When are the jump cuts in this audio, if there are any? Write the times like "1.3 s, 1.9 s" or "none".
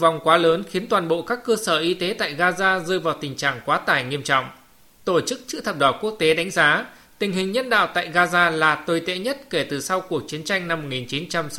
none